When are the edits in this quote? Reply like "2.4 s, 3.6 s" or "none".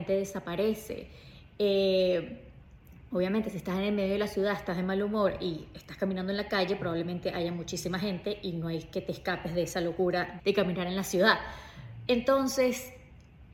10.4 s, 12.1 s